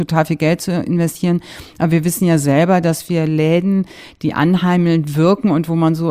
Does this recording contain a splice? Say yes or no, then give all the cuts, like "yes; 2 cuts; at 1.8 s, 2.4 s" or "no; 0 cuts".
no; 0 cuts